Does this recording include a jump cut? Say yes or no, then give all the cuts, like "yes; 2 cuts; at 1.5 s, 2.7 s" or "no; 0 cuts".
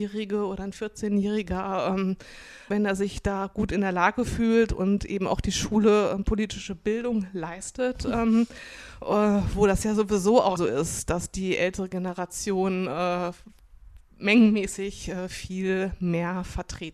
yes; 2 cuts; at 2.7 s, 10.6 s